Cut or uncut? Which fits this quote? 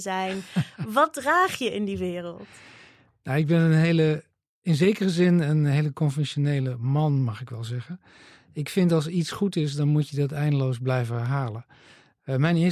uncut